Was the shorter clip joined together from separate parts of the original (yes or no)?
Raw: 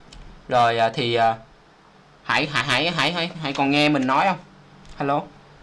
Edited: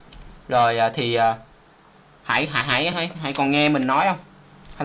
yes